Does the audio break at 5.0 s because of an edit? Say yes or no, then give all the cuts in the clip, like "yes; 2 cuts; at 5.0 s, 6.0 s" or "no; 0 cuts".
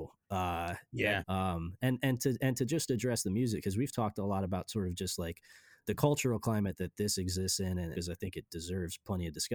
no; 2 cuts; at 1.2 s, 7.9 s